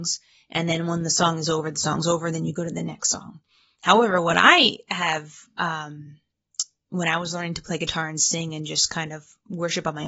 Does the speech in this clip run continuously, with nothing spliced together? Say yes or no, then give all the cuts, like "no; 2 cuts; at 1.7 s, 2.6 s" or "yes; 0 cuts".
yes; 0 cuts